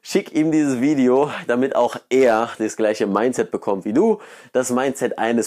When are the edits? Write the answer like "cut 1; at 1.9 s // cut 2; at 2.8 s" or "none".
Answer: none